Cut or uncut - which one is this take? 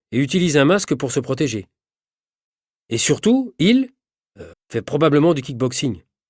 cut